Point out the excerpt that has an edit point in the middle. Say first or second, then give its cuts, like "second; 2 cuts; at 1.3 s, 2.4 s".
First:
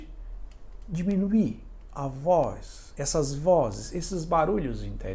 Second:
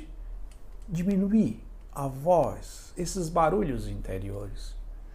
second; 1 cut; at 3.0 s